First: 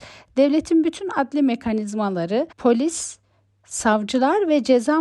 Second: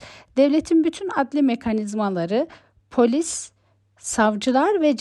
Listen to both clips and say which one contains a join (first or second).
first